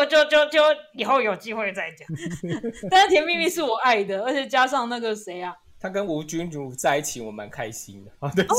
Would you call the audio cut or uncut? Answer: uncut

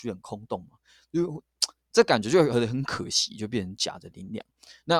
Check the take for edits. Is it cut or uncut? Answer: uncut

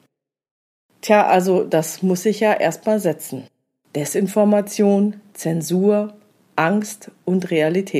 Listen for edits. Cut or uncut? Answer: uncut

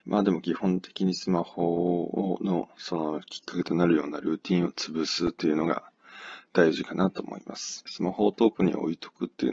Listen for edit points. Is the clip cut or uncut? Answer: cut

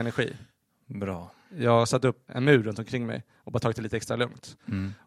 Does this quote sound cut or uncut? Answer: cut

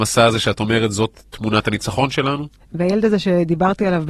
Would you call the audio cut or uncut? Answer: cut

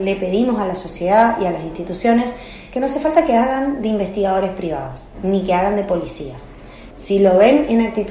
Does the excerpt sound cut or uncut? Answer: cut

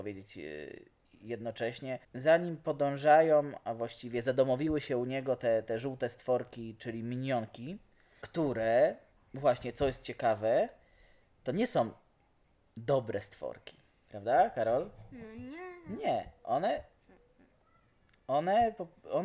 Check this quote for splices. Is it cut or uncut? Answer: uncut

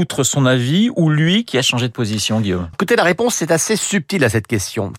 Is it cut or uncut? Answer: cut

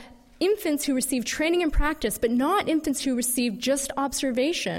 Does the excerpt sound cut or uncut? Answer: uncut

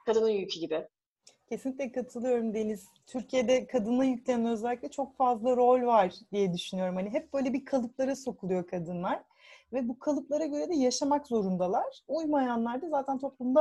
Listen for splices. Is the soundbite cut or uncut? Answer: uncut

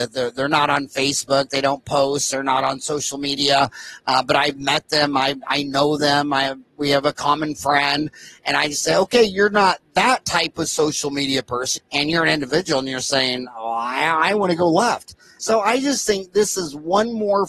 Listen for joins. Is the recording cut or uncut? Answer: cut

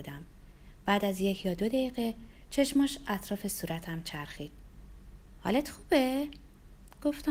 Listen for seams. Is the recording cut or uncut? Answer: uncut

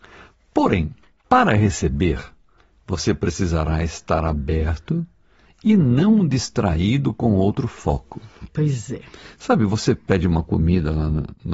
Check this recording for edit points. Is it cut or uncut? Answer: uncut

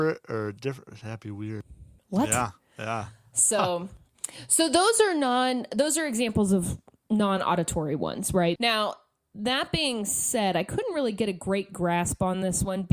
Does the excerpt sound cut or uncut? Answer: cut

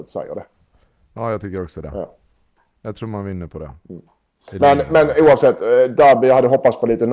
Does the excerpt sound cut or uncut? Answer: uncut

